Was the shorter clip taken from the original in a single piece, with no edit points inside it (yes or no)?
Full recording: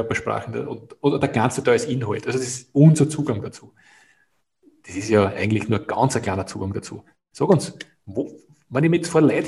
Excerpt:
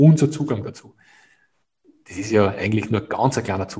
yes